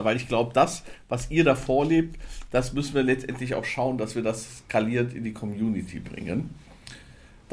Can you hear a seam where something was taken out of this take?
no; 0 cuts

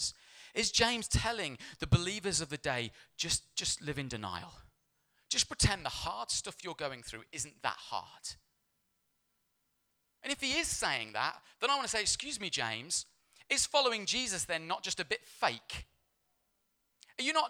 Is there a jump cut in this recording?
no; 0 cuts

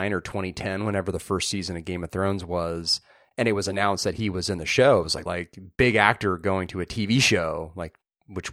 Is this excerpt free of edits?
no; 1 cut; at 5.3 s

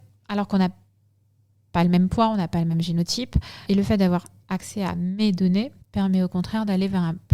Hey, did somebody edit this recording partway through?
yes; 2 cuts; at 3.7 s, 5.8 s

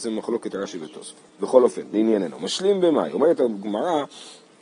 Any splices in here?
yes; 1 cut; at 1.3 s

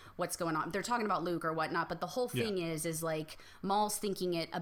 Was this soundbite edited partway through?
no; 0 cuts

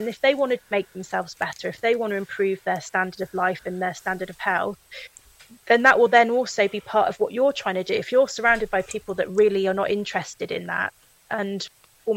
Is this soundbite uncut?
yes; 0 cuts

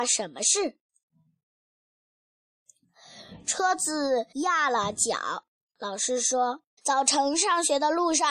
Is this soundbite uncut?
no; 2 cuts; at 4.3 s, 6.8 s

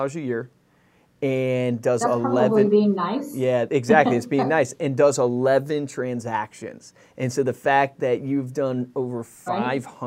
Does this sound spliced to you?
no; 0 cuts

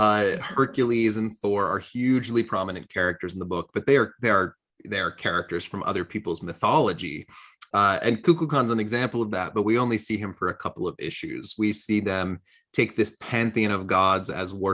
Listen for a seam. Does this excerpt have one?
no; 0 cuts

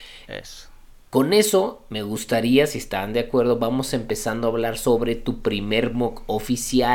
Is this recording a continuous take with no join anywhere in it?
yes; 0 cuts

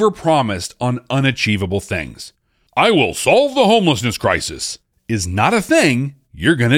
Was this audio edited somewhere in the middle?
no; 0 cuts

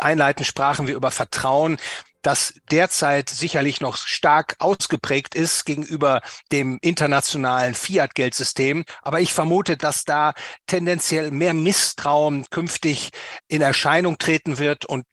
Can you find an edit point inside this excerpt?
yes; 1 cut; at 9.8 s

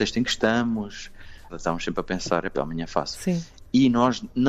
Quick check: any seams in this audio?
yes; 2 cuts; at 1.5 s, 2.5 s

